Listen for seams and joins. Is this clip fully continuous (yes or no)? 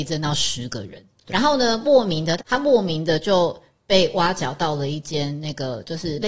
no